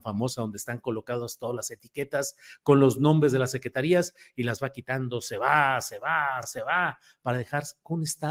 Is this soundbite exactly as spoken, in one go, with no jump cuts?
yes; 0 cuts

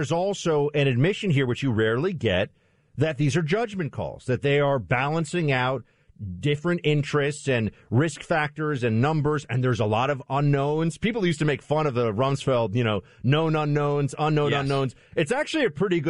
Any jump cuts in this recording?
no; 0 cuts

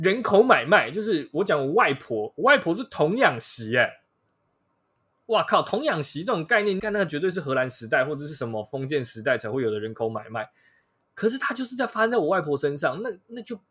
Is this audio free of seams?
no; 1 cut; at 6.8 s

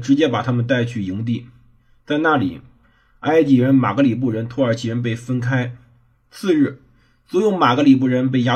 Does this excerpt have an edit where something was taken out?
no; 0 cuts

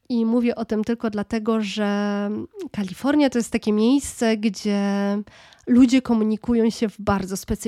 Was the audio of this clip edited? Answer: no; 0 cuts

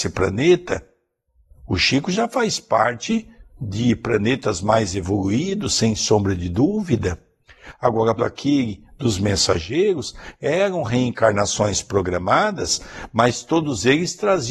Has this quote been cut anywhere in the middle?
yes; 1 cut; at 8.2 s

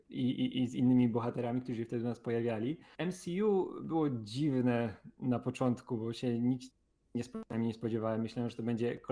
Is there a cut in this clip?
no; 0 cuts

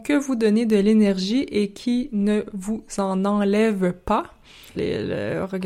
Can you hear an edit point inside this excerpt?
yes; 1 cut; at 4.8 s

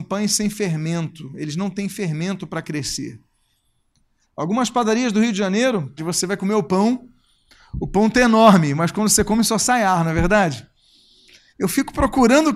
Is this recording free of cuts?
no; 2 cuts; at 6.0 s, 11.5 s

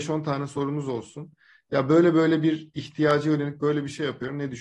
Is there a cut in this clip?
no; 0 cuts

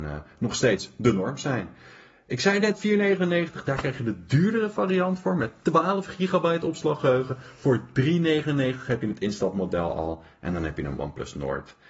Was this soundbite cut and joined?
no; 0 cuts

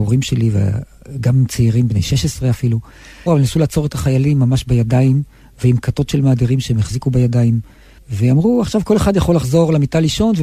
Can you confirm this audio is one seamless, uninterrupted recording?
no; 2 cuts; at 3.3 s, 8.0 s

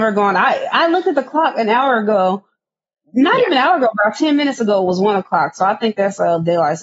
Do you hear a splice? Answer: no; 0 cuts

